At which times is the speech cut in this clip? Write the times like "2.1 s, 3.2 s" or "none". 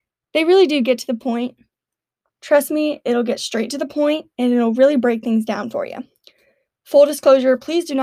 2.3 s